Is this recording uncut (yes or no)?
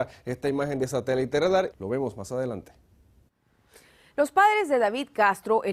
no